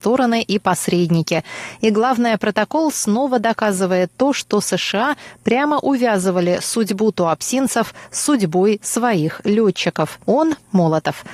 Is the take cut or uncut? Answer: cut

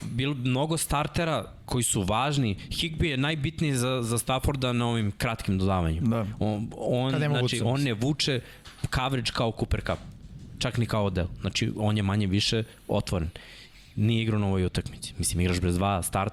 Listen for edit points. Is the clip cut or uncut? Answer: uncut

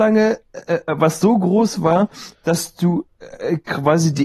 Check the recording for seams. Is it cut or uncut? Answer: uncut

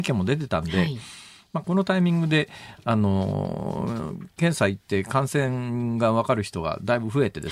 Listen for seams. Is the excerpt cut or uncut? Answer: cut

